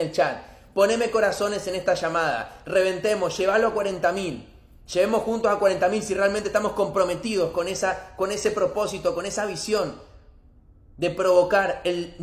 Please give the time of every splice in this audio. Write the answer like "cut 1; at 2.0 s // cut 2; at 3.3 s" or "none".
none